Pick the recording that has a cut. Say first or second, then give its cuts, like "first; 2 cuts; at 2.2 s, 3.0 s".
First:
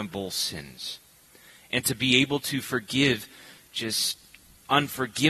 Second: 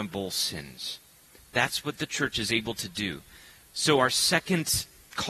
second; 1 cut; at 1.4 s